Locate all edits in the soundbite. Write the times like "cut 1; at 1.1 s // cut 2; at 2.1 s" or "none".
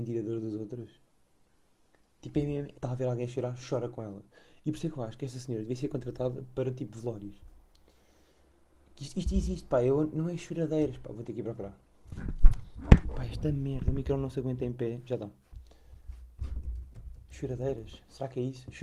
cut 1; at 2.7 s // cut 2; at 13.0 s